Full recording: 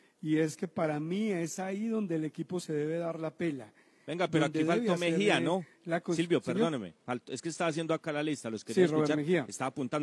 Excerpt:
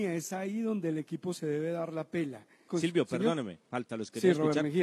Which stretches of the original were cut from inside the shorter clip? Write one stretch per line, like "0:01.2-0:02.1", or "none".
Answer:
0:03.9-0:06.0
0:07.2-0:08.4